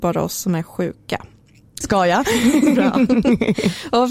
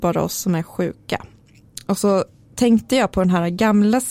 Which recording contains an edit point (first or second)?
first